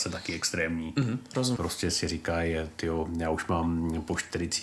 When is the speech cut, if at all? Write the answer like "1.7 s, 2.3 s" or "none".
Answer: 1.6 s